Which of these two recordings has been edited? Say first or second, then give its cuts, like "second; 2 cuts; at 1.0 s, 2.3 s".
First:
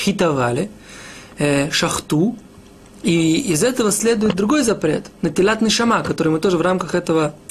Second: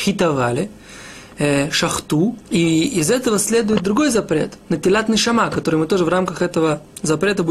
second; 1 cut; at 2.5 s